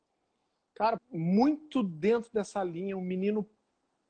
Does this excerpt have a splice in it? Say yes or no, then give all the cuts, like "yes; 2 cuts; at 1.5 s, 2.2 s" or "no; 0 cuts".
yes; 1 cut; at 1.0 s